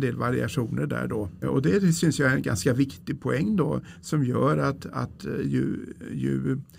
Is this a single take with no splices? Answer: no; 1 cut; at 1.4 s

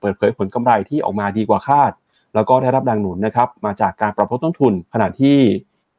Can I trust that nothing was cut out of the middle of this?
no; 1 cut; at 4.9 s

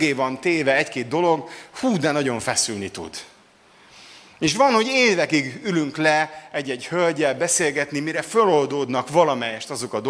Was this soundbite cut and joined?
no; 0 cuts

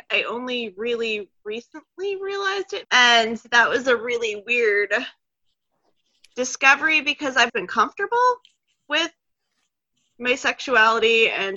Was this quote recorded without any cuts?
no; 2 cuts; at 2.8 s, 7.5 s

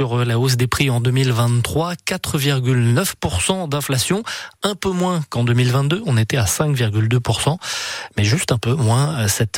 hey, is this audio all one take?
yes; 0 cuts

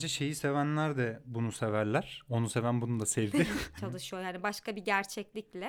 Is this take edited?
yes; 1 cut; at 3.8 s

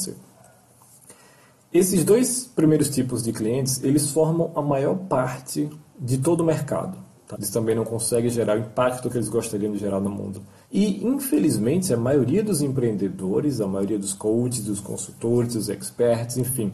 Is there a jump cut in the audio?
yes; 2 cuts; at 7.3 s, 10.6 s

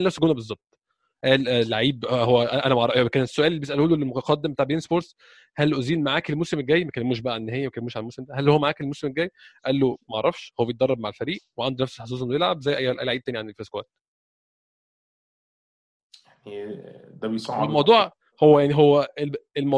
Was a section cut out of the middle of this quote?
no; 0 cuts

